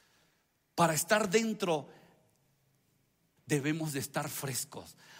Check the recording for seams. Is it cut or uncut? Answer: cut